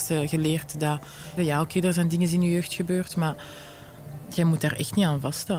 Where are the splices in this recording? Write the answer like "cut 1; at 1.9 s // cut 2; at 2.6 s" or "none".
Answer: cut 1; at 1.4 s